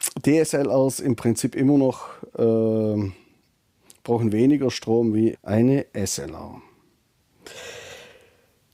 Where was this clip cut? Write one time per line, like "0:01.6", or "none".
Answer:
0:05.3